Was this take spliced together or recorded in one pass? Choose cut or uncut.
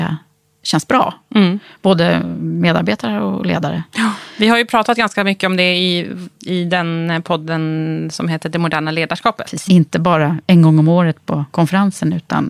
cut